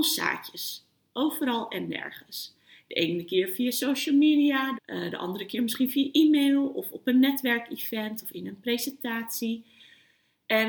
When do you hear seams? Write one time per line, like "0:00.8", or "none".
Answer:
0:04.8